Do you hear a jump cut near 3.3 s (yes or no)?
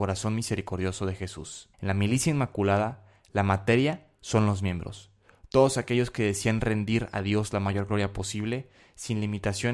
no